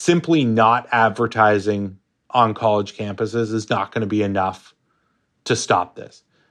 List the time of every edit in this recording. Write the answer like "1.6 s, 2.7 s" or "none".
none